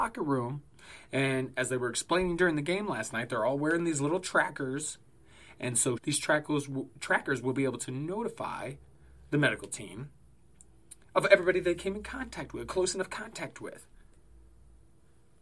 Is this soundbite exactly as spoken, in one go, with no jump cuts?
no; 2 cuts; at 6.0 s, 11.0 s

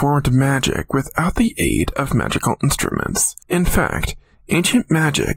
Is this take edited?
no; 0 cuts

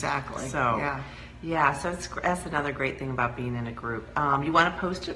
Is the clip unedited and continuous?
yes; 0 cuts

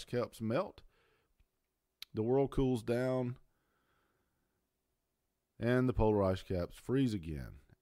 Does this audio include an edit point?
no; 0 cuts

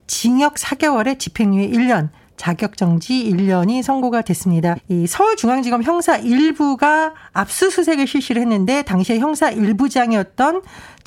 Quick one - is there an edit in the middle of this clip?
yes; 1 cut; at 4.7 s

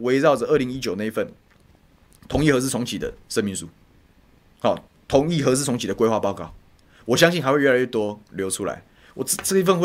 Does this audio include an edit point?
no; 0 cuts

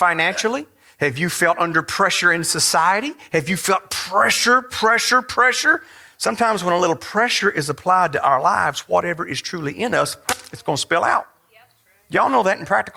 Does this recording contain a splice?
no; 0 cuts

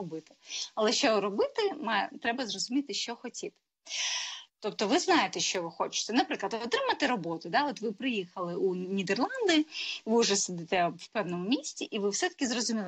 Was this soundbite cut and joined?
yes; 1 cut; at 4.5 s

